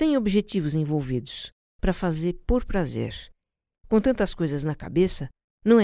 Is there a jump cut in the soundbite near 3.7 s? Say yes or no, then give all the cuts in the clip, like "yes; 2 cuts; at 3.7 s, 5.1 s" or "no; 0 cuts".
yes; 1 cut; at 3.7 s